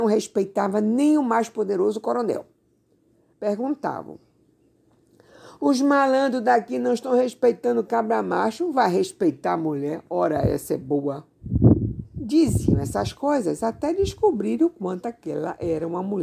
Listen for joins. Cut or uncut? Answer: cut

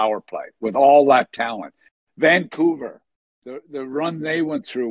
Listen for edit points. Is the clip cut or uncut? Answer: uncut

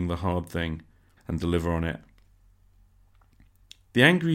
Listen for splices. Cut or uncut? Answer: cut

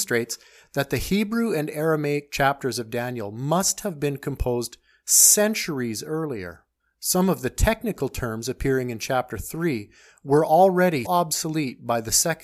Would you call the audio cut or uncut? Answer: cut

